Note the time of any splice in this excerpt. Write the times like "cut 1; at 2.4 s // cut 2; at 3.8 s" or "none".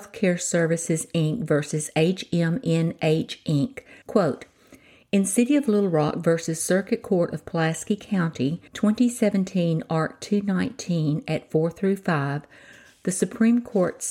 cut 1; at 4.0 s // cut 2; at 8.7 s